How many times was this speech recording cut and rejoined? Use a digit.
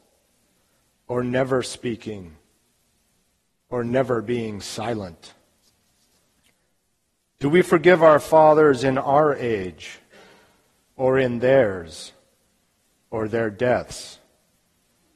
0